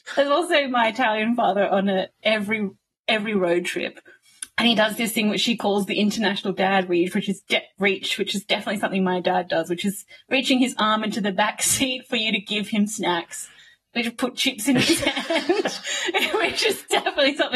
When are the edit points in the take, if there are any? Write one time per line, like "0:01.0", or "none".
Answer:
none